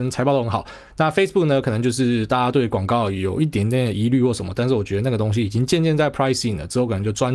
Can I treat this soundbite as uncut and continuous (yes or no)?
yes